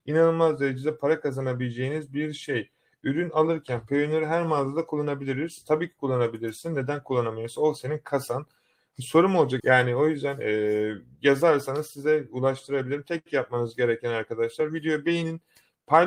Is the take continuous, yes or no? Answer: no